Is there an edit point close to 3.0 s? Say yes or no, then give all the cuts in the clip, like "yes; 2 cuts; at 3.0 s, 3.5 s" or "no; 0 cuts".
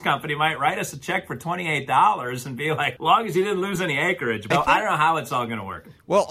yes; 2 cuts; at 3.0 s, 4.5 s